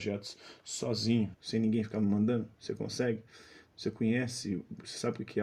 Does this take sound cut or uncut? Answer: cut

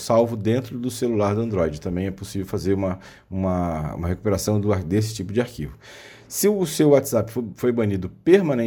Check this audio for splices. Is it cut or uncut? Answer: uncut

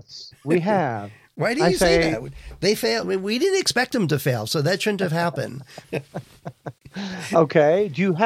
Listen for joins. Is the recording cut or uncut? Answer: cut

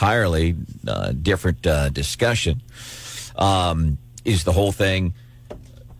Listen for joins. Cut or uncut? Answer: uncut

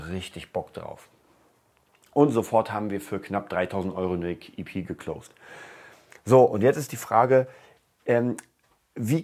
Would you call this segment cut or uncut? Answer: uncut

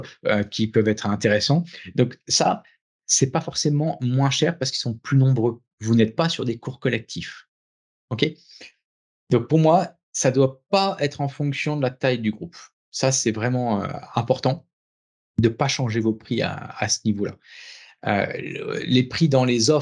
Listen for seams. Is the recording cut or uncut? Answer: cut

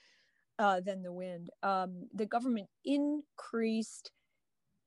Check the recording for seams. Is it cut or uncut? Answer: cut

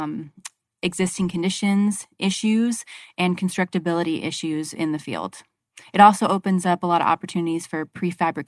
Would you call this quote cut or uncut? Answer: uncut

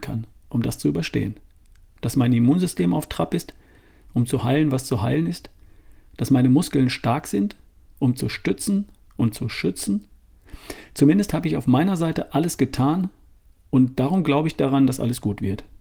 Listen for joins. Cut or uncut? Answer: uncut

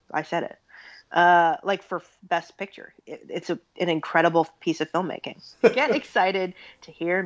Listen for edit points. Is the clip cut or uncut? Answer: cut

